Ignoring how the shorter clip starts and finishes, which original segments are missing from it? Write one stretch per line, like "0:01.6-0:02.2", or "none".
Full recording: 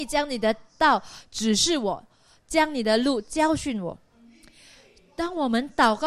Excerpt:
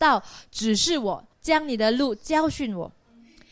0:02.1-0:02.4